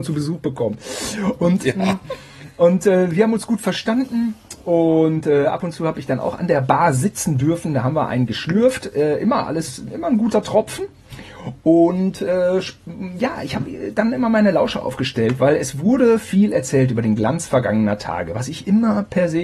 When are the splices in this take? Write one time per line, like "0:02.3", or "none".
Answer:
none